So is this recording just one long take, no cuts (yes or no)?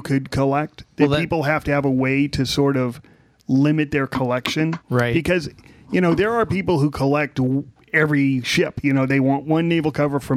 yes